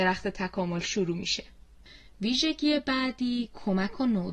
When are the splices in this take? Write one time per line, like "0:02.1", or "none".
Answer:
none

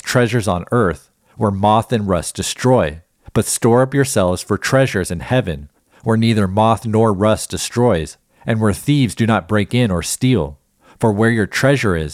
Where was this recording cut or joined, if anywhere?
0:03.3

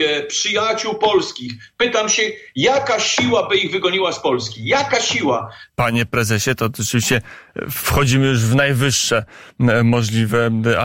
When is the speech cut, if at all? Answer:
0:05.7

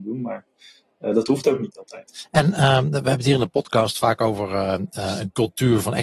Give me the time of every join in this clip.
none

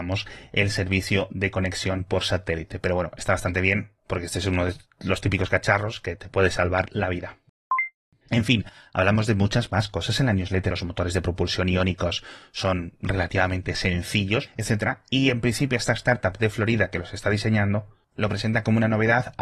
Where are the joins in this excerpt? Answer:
0:10.7
0:14.5

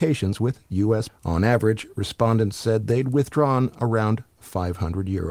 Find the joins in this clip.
0:01.1

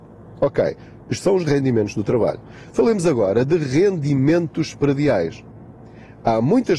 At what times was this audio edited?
none

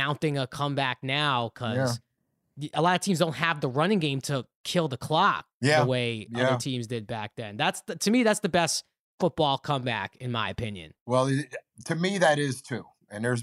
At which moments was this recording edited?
none

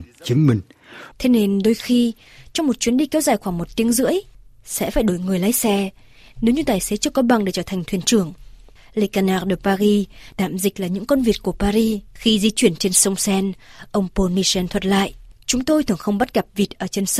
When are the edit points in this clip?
0:01.1

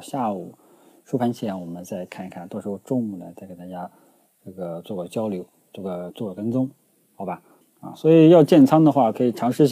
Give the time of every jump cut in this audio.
0:06.1
0:07.6

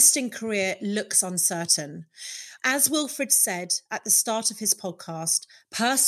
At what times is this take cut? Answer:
0:02.6

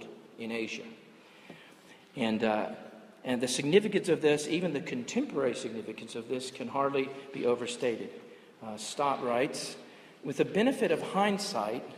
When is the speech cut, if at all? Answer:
none

